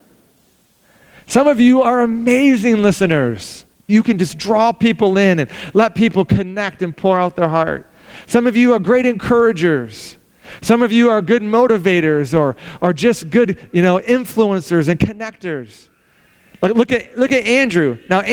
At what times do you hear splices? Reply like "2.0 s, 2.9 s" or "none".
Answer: 3.9 s